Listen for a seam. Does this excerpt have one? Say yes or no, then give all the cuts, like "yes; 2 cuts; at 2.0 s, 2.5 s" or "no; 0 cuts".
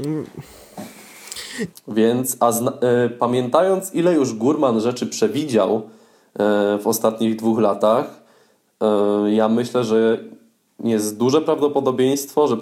yes; 1 cut; at 1.7 s